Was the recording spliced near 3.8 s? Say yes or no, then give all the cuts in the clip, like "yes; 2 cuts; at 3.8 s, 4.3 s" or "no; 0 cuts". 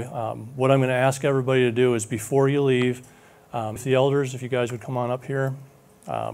yes; 1 cut; at 3.8 s